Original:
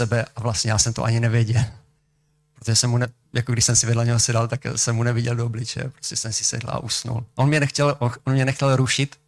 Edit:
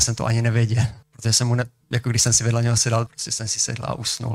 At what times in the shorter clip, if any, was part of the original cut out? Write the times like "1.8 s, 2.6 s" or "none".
1.0 s, 3.1 s